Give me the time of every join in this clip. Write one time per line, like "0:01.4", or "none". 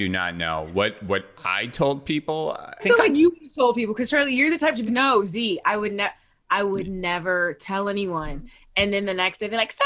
0:02.8
0:04.9